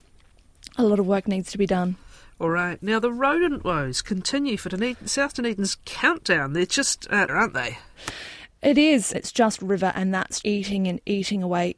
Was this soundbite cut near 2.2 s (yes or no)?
no